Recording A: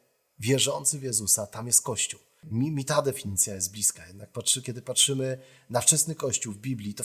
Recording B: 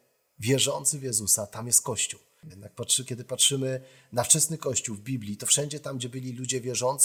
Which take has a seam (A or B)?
B